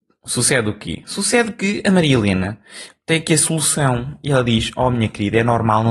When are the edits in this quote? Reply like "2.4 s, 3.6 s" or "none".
none